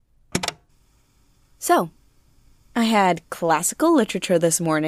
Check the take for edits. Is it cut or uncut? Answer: uncut